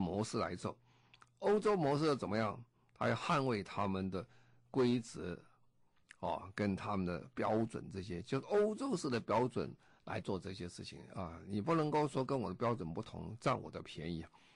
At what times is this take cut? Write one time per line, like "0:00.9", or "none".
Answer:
none